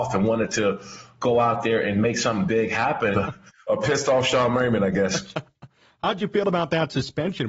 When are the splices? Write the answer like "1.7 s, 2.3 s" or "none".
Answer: 3.1 s